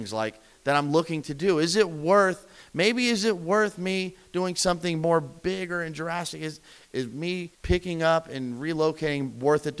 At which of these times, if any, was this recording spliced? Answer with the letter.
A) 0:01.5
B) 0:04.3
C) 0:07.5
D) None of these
C